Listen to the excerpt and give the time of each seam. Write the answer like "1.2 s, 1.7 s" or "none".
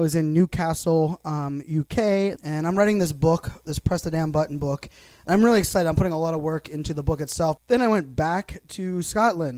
2.4 s, 7.6 s